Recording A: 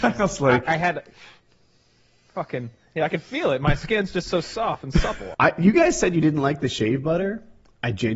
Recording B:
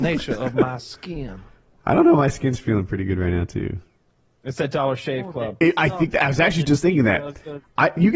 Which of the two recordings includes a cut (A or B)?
A